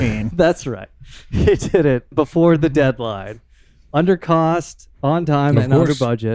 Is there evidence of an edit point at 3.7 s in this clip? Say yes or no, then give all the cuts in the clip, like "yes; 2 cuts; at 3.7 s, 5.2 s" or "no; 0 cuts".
no; 1 cut; at 2.1 s